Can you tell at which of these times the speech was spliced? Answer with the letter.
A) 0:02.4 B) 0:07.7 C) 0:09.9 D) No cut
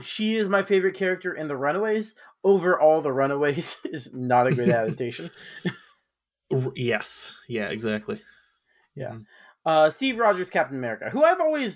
C